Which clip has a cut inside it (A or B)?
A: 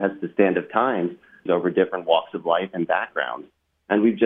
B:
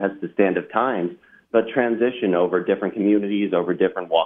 A